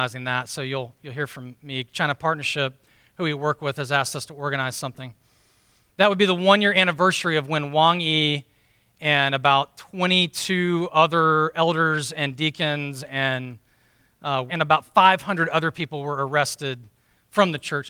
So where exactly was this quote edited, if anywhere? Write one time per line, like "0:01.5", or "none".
0:14.5